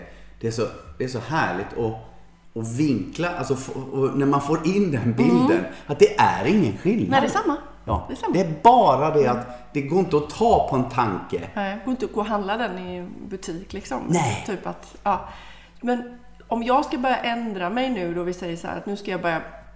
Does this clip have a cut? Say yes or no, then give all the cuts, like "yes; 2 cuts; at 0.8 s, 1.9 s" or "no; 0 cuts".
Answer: no; 0 cuts